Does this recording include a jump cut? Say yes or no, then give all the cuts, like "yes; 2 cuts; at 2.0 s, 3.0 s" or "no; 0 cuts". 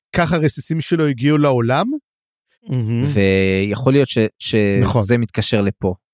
yes; 1 cut; at 2.5 s